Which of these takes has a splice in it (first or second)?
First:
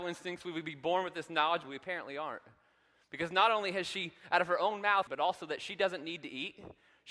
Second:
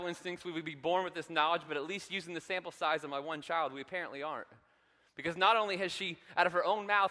first